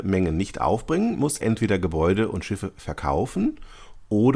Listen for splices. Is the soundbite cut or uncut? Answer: cut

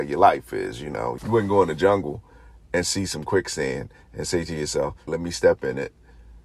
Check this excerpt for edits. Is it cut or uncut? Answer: cut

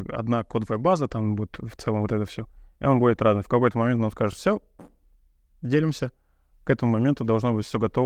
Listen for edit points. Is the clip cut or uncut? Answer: uncut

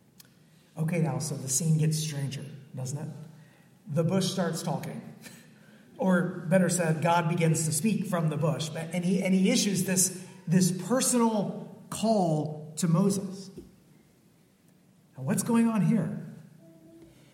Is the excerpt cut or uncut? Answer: uncut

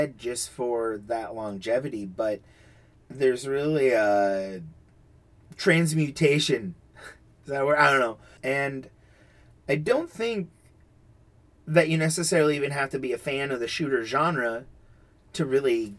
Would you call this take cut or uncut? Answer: cut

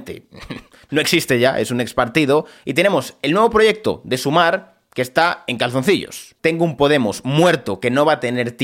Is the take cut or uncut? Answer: cut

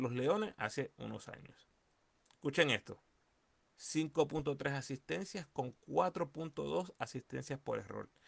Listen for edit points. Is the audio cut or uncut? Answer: cut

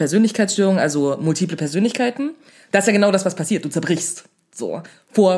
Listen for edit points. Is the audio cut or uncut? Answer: uncut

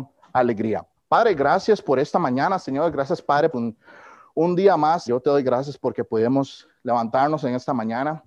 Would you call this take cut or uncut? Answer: cut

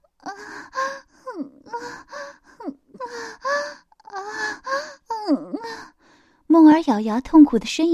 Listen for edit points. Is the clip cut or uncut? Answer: uncut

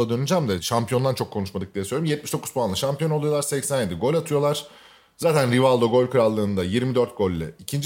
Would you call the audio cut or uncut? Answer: uncut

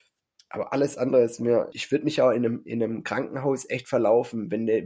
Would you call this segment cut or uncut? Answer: cut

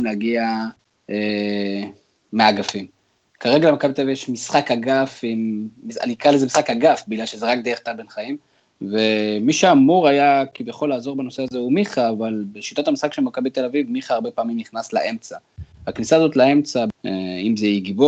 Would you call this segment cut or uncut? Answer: cut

